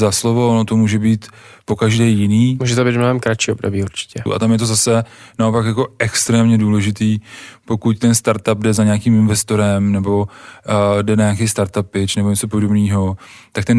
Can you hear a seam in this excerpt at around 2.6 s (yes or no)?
no